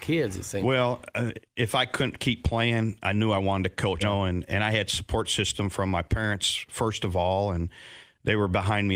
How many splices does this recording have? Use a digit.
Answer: 1